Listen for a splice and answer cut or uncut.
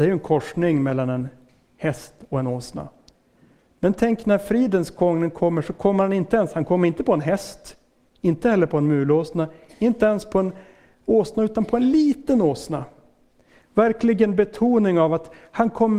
uncut